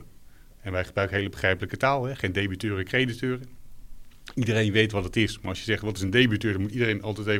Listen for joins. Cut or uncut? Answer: uncut